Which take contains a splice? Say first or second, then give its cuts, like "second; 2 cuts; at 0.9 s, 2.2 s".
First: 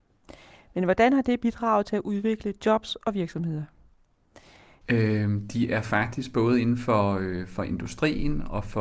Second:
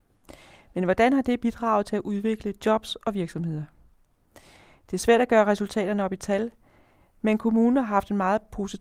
first; 1 cut; at 4.8 s